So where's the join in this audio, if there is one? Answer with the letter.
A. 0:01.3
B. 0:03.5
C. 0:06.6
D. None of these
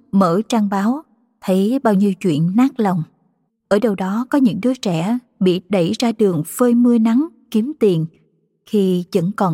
B